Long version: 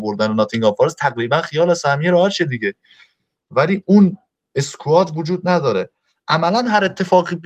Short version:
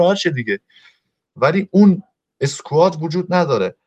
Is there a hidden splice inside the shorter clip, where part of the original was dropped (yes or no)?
no